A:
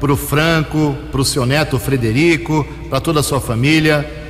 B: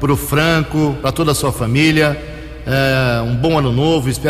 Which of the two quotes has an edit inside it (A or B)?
B